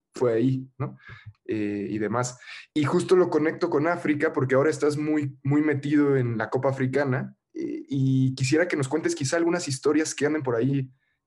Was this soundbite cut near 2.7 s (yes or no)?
no